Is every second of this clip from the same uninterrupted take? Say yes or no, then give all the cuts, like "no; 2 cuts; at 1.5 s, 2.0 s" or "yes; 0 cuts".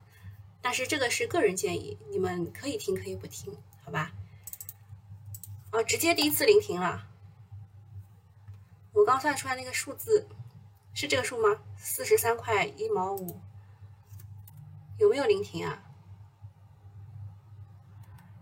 yes; 0 cuts